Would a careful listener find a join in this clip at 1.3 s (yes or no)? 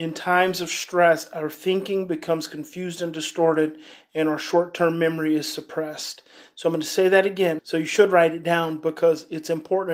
no